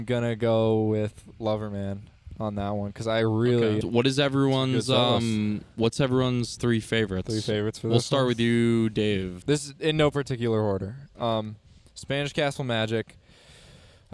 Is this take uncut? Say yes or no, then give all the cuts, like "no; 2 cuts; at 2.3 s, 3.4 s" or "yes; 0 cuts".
no; 2 cuts; at 3.8 s, 9.4 s